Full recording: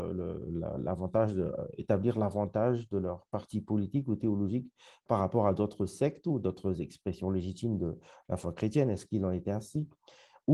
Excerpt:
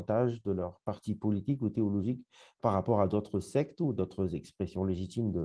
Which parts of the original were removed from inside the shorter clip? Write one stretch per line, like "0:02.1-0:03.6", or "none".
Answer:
none